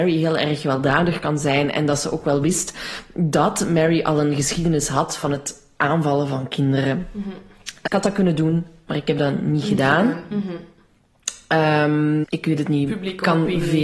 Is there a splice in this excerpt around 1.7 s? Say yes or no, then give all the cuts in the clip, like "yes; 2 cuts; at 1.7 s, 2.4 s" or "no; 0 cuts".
no; 3 cuts; at 7.9 s, 10.3 s, 12.2 s